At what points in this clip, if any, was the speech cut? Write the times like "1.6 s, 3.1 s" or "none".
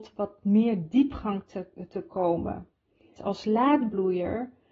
3.2 s